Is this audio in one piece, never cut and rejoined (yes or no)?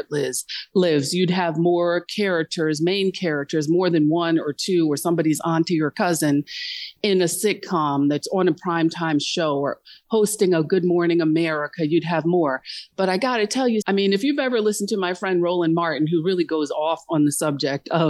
no